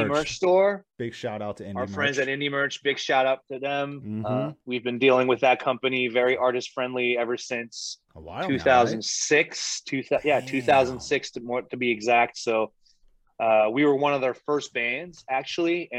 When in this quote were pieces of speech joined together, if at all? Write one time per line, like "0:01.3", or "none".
none